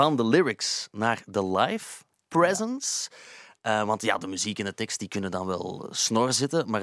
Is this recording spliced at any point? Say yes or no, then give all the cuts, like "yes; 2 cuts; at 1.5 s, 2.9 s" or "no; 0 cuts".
no; 0 cuts